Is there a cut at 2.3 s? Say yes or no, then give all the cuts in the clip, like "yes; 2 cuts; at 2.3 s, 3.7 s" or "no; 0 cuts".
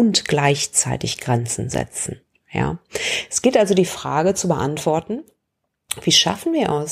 yes; 1 cut; at 2.3 s